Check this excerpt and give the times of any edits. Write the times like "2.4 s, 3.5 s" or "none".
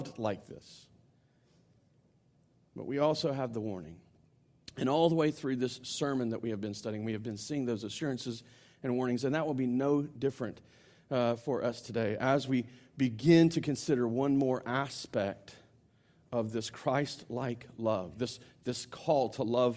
none